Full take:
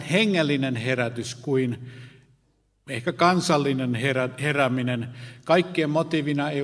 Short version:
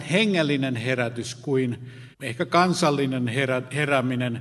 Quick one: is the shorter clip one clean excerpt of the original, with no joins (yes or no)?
no